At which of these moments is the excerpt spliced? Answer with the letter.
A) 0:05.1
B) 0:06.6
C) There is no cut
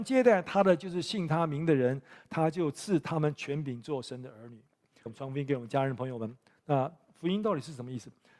A